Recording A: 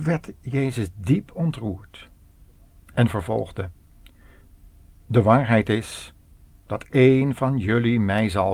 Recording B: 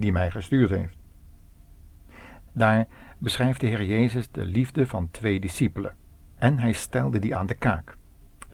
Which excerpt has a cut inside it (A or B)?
B